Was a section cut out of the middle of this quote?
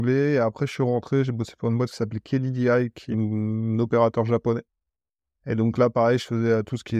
yes; 1 cut; at 3.1 s

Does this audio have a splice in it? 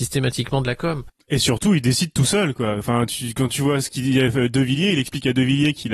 no; 0 cuts

